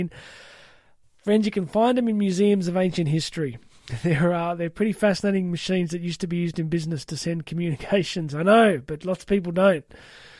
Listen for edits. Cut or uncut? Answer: cut